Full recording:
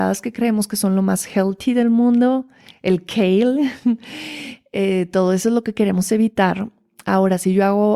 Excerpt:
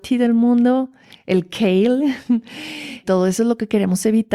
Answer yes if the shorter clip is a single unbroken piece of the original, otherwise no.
no